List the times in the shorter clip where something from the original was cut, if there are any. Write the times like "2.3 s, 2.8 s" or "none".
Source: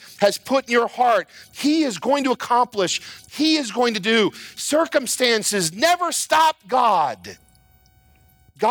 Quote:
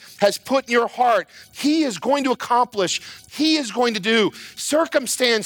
none